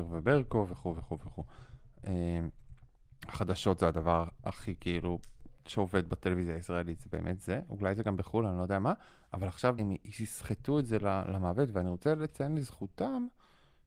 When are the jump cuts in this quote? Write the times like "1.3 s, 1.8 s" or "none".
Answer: 9.8 s